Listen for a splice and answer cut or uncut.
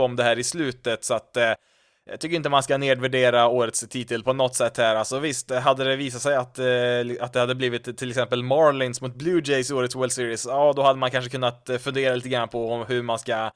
uncut